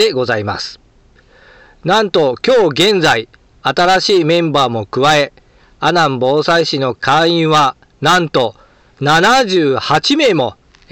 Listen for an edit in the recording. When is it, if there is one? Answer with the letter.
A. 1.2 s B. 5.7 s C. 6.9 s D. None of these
C